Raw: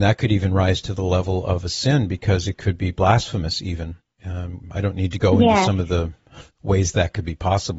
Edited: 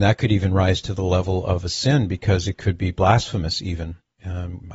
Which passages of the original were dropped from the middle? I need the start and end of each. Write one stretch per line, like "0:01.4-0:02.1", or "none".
none